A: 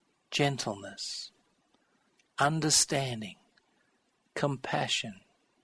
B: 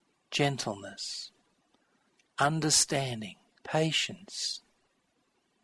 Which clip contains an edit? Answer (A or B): B